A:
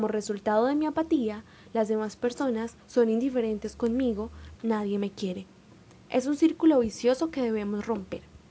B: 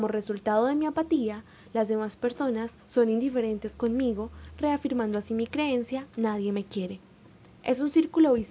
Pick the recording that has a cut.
A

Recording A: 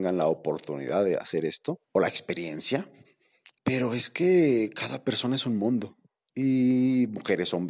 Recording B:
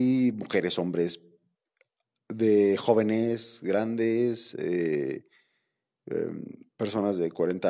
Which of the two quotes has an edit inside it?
A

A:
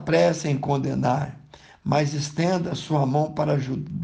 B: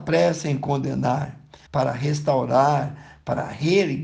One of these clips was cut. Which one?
B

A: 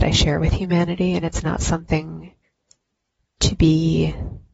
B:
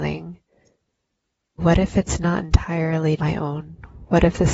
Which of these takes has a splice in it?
B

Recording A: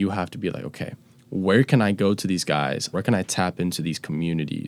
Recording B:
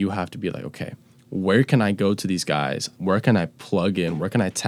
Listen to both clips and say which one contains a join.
A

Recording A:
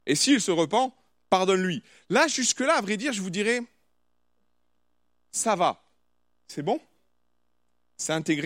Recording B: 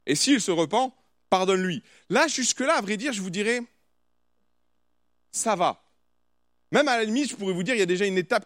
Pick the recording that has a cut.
A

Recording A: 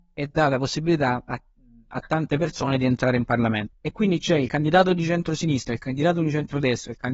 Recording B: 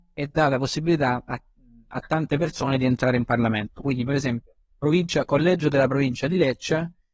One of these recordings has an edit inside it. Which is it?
A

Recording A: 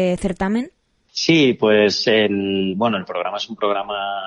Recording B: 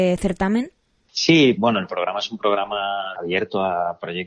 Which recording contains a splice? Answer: B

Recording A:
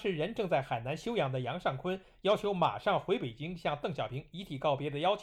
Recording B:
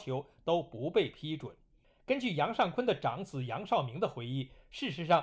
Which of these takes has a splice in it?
B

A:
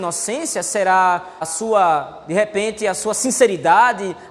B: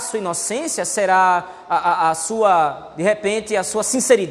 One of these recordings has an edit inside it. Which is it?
A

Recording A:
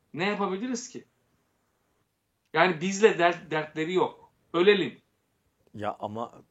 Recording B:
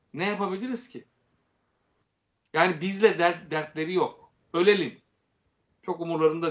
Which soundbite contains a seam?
A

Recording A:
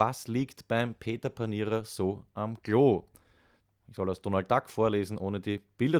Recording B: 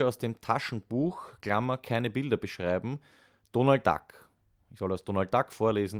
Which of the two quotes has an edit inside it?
A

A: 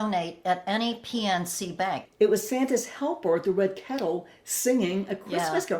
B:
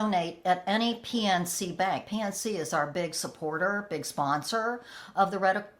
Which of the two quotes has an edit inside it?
A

